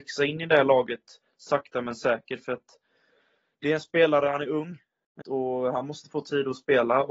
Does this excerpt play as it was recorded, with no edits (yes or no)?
no